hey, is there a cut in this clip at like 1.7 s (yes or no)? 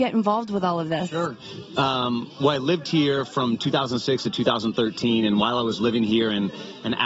no